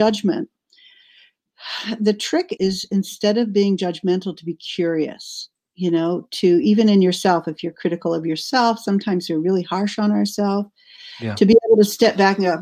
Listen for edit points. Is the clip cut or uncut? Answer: cut